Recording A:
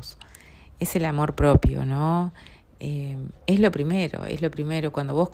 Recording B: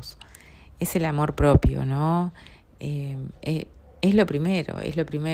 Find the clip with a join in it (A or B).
A